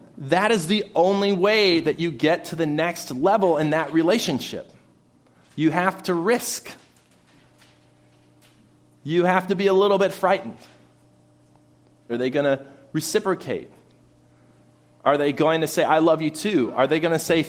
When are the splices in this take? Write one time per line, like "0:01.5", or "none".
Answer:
0:12.1